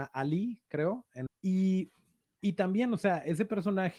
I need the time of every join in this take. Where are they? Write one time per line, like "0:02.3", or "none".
0:01.3

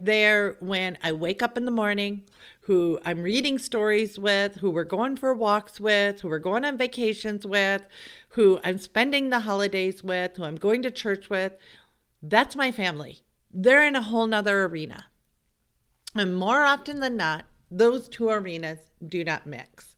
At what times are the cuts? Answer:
none

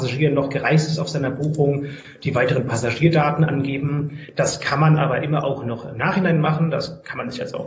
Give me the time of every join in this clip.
none

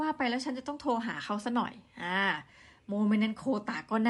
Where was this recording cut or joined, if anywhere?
none

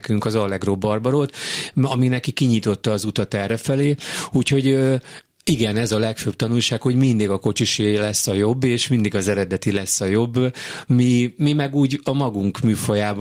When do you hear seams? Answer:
none

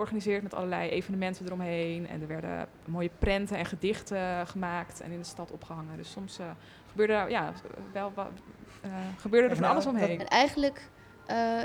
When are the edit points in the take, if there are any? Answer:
0:10.2

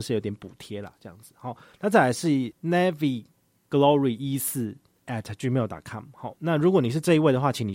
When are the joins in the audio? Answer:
none

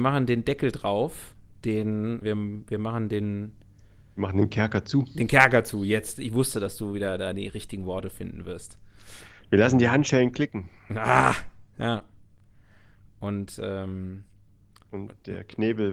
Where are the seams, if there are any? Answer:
0:02.2

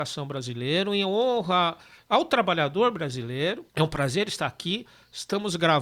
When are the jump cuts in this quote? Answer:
0:03.7

